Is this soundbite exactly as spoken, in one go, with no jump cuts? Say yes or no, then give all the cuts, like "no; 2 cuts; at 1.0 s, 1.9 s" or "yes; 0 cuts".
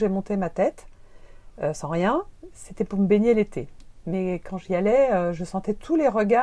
yes; 0 cuts